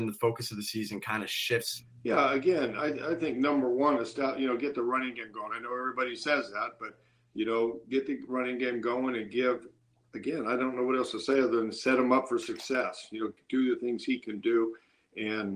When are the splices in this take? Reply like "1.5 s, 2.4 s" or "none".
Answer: none